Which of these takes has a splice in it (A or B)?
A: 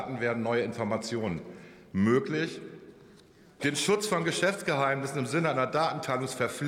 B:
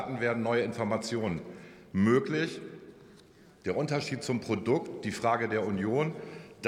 A